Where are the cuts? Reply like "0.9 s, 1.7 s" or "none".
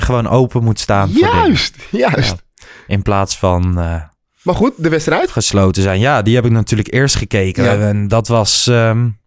none